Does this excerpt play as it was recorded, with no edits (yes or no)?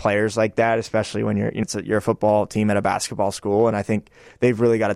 no